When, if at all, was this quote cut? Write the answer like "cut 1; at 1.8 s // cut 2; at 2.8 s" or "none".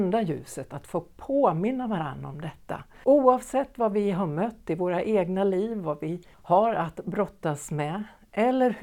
cut 1; at 3.0 s // cut 2; at 6.3 s